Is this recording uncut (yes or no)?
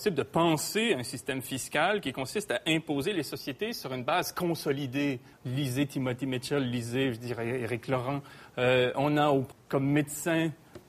no